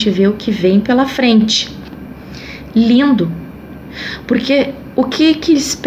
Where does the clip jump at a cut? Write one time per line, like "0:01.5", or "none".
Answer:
none